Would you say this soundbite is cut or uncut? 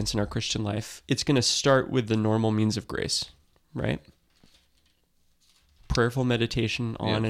uncut